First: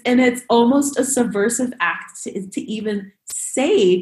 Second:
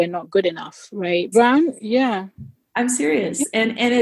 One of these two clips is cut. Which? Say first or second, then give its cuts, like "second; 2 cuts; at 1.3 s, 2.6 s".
second; 1 cut; at 1.3 s